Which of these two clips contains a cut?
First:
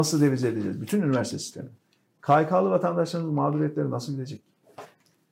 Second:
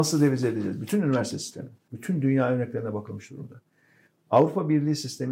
second; 1 cut; at 1.9 s

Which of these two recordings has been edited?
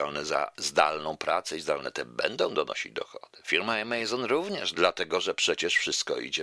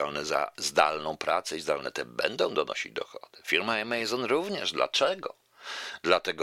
first; 1 cut; at 4.7 s

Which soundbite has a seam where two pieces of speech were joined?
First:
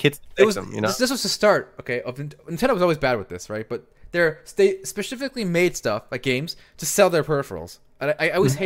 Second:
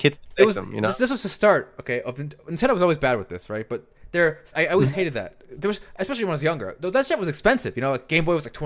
second; 1 cut; at 4.5 s

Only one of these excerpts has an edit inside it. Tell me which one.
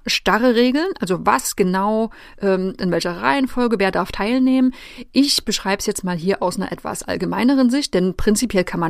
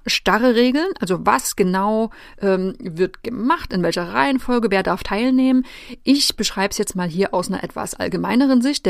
first; 1 cut; at 2.8 s

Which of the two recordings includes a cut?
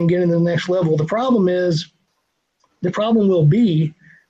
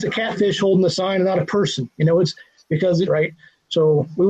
second; 1 cut; at 3.1 s

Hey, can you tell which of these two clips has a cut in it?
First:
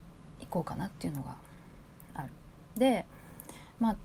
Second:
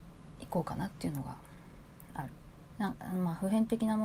second; 1 cut; at 2.7 s

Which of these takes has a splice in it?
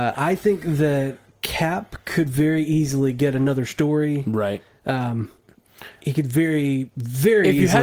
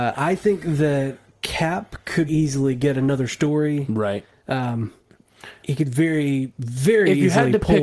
second; 1 cut; at 2.3 s

